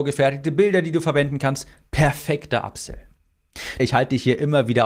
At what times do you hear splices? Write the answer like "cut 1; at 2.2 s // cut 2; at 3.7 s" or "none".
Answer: cut 1; at 3.8 s